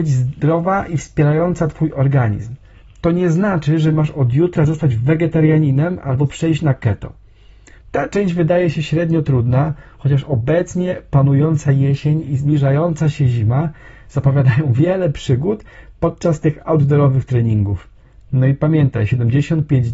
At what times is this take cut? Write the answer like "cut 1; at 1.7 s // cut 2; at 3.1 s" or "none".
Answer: cut 1; at 7.8 s

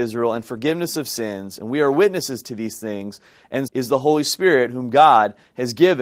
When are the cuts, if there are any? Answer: cut 1; at 3.7 s

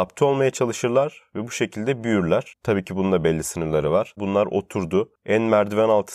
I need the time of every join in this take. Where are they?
cut 1; at 2.6 s // cut 2; at 4.2 s

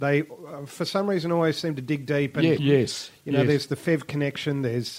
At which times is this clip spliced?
cut 1; at 2.6 s

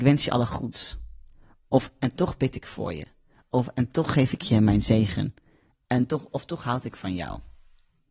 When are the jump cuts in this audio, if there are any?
none

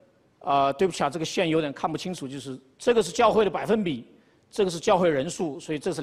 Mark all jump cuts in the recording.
none

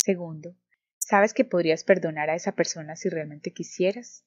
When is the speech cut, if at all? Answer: none

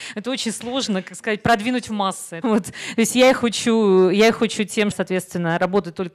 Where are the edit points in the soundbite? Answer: cut 1; at 2.4 s // cut 2; at 4.9 s

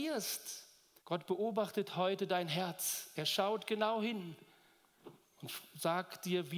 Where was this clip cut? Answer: cut 1; at 1.0 s

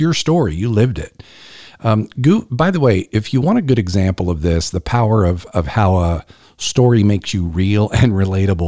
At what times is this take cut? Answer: none

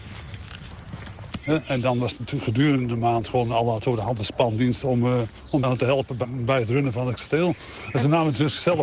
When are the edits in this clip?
cut 1; at 1.4 s // cut 2; at 5.6 s

